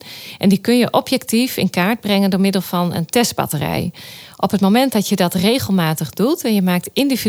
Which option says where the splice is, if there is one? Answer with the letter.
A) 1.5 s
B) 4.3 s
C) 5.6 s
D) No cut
D